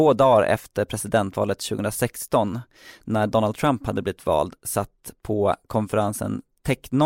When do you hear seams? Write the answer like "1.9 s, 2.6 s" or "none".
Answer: none